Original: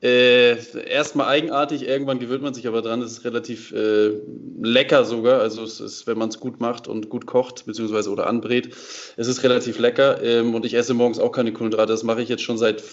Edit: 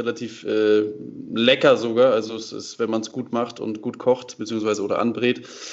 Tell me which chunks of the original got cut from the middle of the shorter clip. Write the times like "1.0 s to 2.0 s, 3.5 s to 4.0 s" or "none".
none